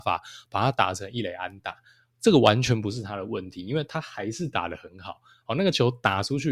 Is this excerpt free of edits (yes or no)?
yes